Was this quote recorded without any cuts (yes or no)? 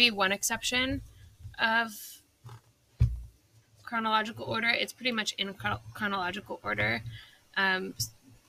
yes